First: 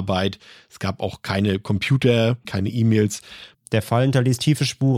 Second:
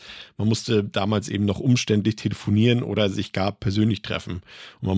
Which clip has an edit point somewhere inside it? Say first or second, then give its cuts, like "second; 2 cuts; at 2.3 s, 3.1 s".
first; 2 cuts; at 2.4 s, 3.5 s